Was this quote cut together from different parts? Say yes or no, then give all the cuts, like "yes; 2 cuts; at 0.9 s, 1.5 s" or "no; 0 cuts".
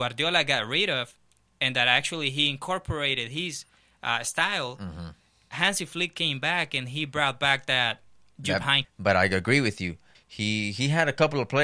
yes; 2 cuts; at 8.8 s, 10.1 s